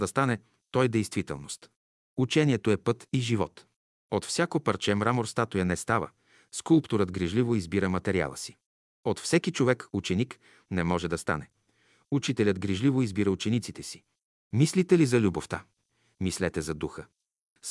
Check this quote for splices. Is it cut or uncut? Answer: uncut